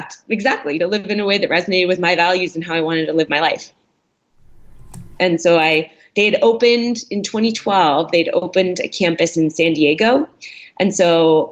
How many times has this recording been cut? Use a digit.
1